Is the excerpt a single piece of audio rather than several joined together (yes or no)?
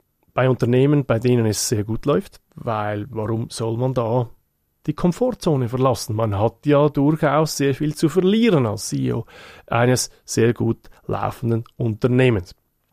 yes